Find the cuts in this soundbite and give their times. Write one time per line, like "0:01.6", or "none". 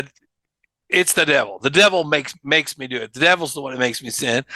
none

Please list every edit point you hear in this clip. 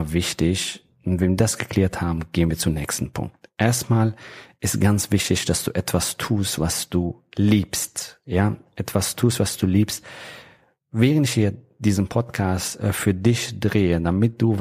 none

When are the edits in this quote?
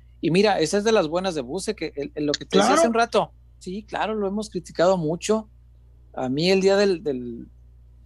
0:03.6

